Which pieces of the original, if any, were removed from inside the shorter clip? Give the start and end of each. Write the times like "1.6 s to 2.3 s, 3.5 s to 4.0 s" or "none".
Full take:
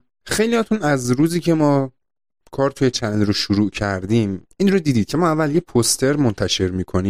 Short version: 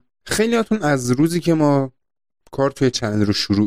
none

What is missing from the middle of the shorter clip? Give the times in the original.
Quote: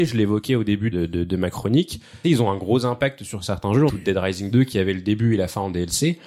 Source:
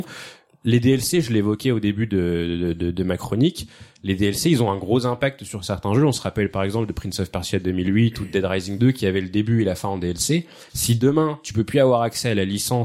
2.1 s to 2.6 s, 3.9 s to 4.4 s, 6.1 s to 8.1 s

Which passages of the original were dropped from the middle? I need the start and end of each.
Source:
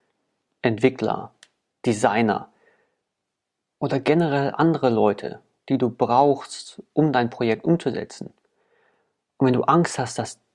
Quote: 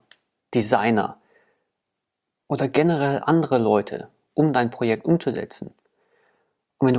5.6 s to 6.9 s

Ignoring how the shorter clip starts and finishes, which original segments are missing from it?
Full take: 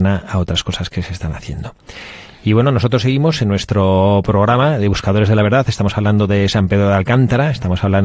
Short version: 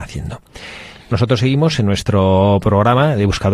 2.4 s to 2.7 s

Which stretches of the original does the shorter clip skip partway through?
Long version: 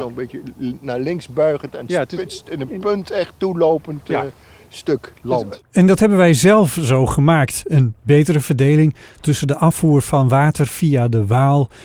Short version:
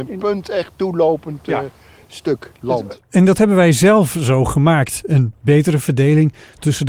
none

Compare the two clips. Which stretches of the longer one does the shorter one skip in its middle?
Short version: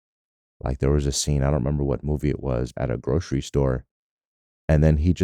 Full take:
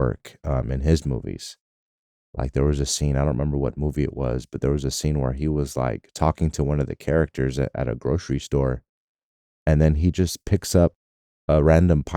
4.5 s to 7.7 s

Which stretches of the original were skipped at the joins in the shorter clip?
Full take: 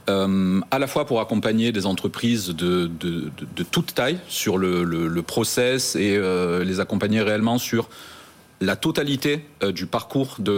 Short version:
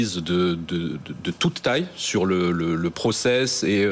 none

